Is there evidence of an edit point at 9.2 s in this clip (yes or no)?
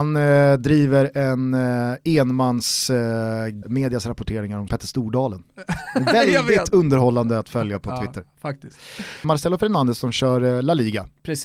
yes